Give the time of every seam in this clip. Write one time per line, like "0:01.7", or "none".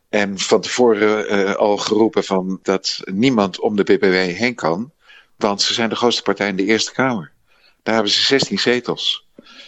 none